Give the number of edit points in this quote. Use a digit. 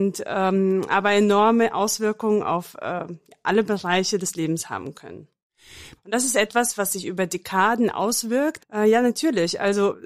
2